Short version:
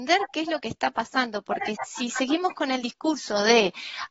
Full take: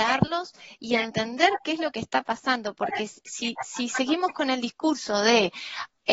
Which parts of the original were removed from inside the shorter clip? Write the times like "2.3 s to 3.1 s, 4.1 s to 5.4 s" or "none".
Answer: 3.1 s to 3.5 s